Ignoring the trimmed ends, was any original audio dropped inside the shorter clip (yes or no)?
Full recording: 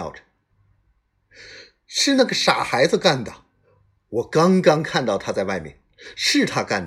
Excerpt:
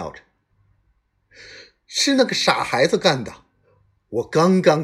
no